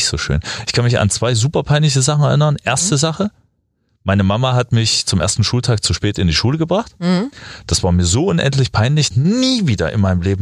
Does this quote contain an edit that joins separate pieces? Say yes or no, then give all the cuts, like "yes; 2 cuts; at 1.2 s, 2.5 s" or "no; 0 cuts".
yes; 1 cut; at 9.1 s